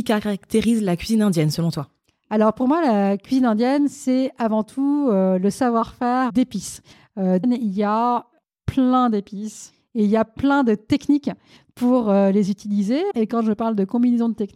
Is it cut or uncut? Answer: cut